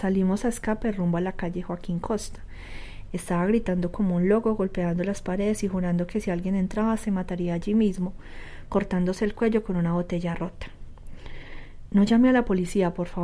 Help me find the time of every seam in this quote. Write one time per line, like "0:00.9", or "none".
0:03.1